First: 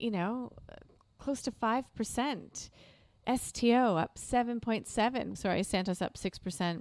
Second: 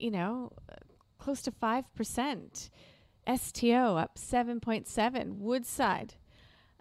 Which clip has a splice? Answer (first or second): first